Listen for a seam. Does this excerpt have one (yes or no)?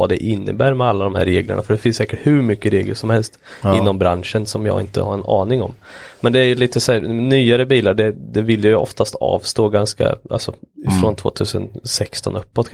no